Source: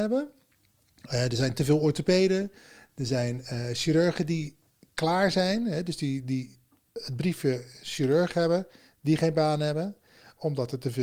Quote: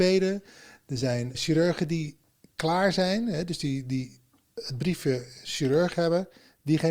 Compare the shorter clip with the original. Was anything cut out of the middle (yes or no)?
yes